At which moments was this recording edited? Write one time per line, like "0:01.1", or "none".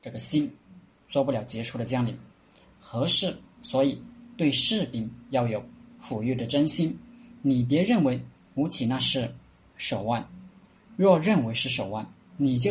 0:03.6